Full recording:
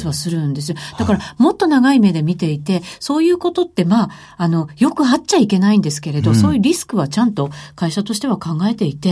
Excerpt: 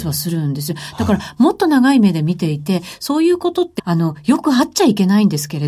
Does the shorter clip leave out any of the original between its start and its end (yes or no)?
yes